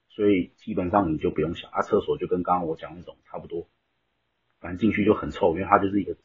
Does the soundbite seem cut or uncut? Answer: uncut